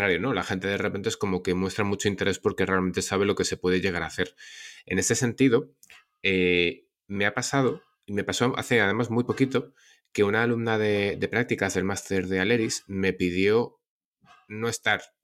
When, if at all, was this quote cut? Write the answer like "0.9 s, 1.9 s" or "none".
none